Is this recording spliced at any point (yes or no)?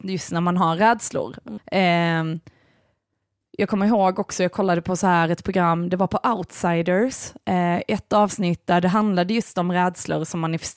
yes